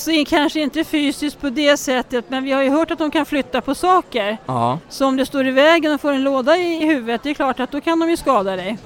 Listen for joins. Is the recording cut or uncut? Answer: uncut